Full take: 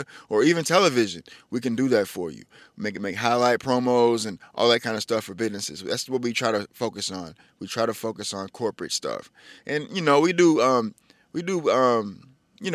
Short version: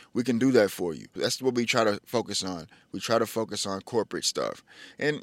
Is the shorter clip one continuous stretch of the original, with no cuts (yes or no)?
no